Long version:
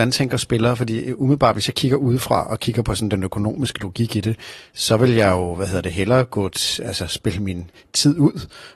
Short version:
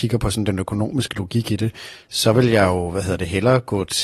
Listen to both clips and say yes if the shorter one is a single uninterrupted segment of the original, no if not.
yes